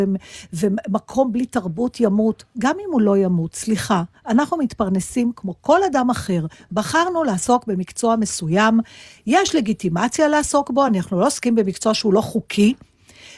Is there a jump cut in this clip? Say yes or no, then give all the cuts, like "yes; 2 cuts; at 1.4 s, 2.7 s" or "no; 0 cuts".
no; 0 cuts